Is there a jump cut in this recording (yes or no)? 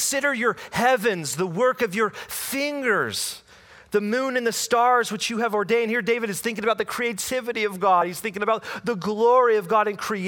no